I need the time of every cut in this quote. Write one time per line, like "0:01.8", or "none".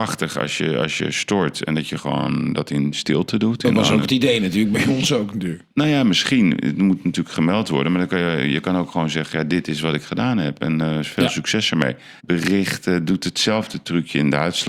0:12.2